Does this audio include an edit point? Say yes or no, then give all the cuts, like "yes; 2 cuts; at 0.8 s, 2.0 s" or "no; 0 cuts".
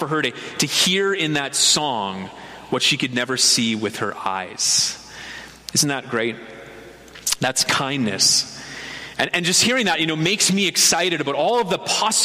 no; 0 cuts